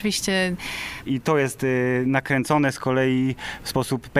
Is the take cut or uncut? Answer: cut